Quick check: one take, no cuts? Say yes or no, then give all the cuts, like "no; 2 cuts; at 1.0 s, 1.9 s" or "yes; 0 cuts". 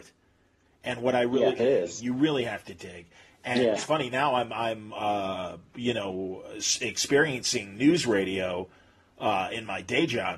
no; 2 cuts; at 1.6 s, 3.8 s